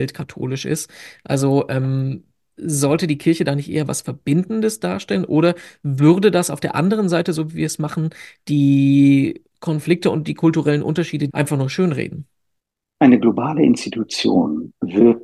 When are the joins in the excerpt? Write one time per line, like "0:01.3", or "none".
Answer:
0:11.3